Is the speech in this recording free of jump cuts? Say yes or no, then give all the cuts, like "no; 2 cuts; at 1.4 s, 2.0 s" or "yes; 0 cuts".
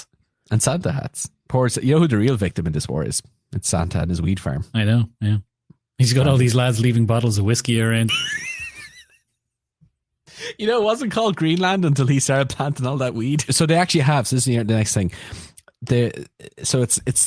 no; 2 cuts; at 8.1 s, 13.5 s